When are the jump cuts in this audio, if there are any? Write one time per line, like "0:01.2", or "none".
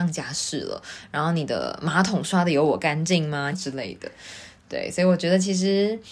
0:03.5